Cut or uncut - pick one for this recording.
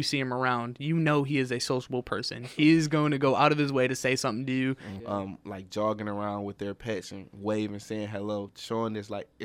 cut